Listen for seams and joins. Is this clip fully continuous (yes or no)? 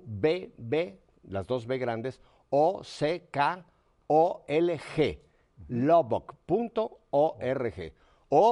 yes